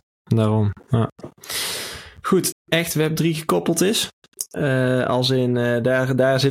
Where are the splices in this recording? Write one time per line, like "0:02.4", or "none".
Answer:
0:02.5